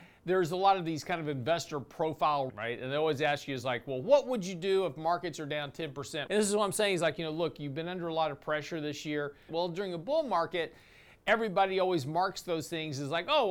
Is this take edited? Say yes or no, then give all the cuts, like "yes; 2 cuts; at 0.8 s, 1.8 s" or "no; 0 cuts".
yes; 3 cuts; at 2.5 s, 6.3 s, 9.5 s